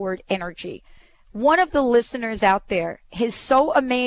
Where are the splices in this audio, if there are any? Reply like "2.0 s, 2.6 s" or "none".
none